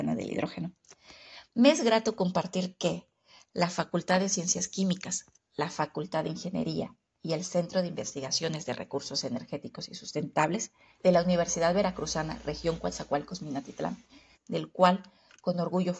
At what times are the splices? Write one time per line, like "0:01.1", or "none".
0:11.0
0:14.4